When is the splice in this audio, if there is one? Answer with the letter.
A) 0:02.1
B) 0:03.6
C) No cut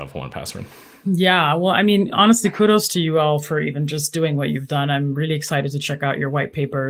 C